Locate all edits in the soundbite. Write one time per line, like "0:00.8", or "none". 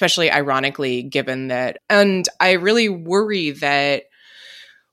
0:01.8